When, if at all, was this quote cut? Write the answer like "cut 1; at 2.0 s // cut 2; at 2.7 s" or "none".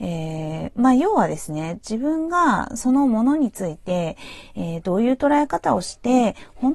none